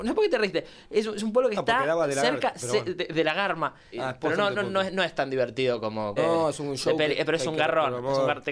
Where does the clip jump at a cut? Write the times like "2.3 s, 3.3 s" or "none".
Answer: 3.9 s, 6.2 s